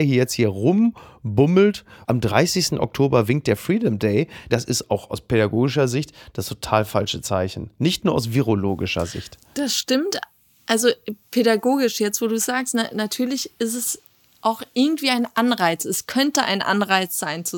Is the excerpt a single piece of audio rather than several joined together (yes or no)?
no